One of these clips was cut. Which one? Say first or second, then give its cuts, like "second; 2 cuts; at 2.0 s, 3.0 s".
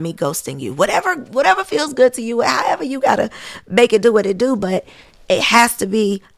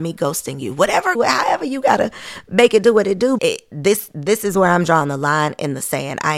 second; 2 cuts; at 1.1 s, 3.4 s